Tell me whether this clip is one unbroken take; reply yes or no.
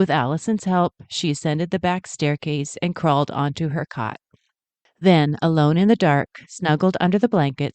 yes